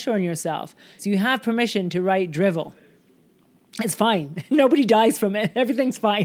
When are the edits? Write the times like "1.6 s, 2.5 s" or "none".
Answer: 1.0 s